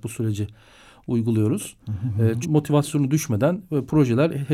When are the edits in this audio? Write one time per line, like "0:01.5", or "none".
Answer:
0:02.4